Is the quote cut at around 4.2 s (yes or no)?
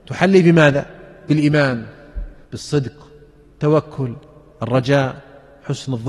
no